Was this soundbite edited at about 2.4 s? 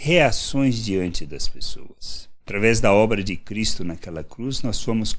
yes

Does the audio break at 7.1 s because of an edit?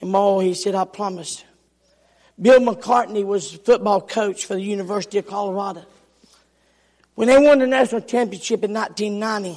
no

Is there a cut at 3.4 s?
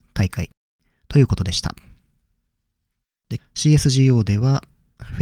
yes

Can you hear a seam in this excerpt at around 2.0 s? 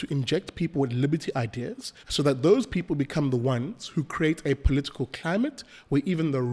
yes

